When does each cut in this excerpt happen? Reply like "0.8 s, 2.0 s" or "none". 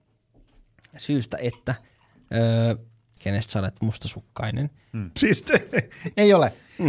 3.2 s, 5.2 s